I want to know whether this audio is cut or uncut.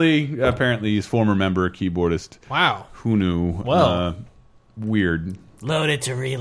uncut